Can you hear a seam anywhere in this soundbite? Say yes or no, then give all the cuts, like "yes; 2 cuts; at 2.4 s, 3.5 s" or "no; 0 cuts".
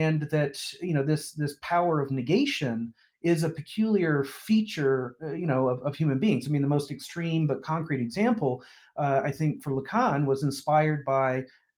no; 0 cuts